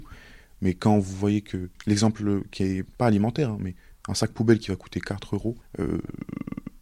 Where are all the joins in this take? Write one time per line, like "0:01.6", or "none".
none